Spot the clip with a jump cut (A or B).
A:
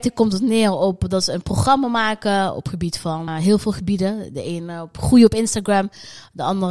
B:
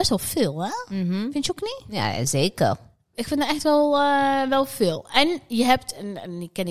A